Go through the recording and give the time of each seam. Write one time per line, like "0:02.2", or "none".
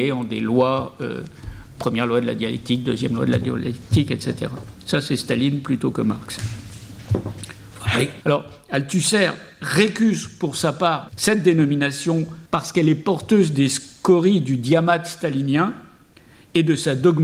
0:08.2
0:11.1
0:12.5